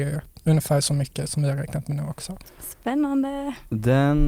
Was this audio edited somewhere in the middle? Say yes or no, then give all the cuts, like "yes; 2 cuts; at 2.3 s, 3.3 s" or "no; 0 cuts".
yes; 1 cut; at 2.4 s